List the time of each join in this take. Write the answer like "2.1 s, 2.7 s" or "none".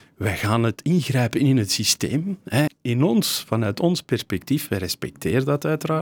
2.7 s, 4.7 s